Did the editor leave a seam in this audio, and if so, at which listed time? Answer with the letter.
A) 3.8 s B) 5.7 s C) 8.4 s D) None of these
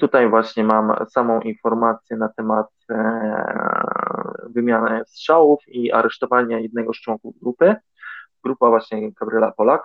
C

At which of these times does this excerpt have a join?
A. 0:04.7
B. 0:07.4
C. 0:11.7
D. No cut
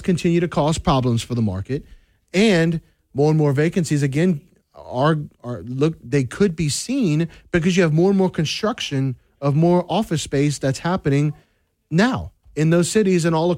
D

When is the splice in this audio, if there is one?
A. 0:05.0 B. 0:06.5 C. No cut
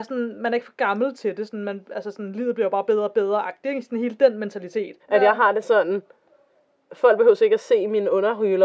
A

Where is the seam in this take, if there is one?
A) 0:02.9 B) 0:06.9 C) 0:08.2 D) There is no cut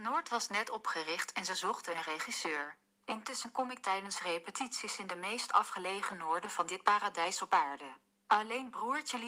A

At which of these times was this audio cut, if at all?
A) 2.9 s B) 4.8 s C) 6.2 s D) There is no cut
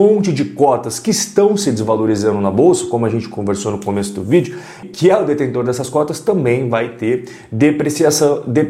B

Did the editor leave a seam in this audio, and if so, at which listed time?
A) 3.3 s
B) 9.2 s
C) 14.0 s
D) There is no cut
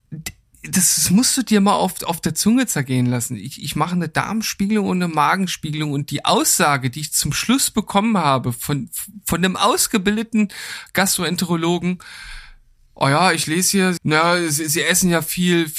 C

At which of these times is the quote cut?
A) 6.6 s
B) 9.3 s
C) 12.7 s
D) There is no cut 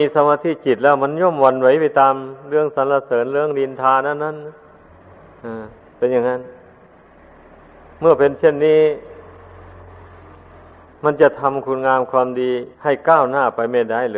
C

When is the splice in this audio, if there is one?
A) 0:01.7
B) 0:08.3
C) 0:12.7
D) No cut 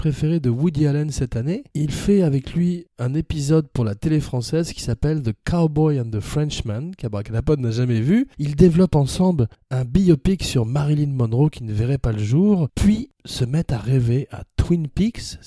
A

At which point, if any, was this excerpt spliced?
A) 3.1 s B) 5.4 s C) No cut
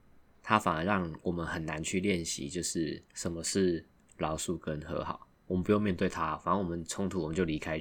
A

